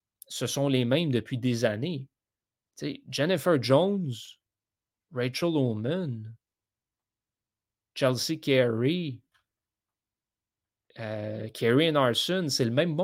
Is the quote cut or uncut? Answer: uncut